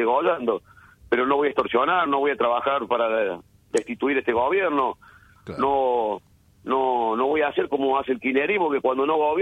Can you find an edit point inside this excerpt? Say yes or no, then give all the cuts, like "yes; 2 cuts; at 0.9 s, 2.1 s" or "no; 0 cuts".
yes; 1 cut; at 2.1 s